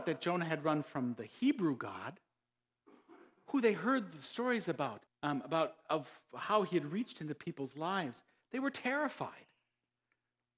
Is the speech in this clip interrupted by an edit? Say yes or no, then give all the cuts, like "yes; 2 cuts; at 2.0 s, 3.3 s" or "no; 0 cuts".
yes; 1 cut; at 5.1 s